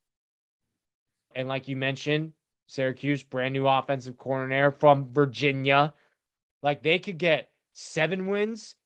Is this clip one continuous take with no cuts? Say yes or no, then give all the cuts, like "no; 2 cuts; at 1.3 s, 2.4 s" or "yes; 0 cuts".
no; 2 cuts; at 1.3 s, 6.5 s